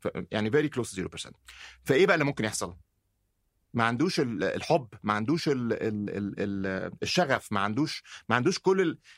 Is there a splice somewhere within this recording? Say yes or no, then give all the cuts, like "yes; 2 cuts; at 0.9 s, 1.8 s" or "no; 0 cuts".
yes; 1 cut; at 3.6 s